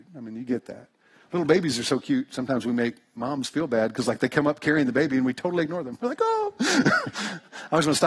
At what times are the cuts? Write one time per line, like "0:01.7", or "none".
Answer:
none